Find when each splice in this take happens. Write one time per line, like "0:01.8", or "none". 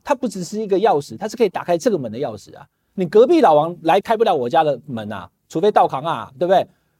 0:04.0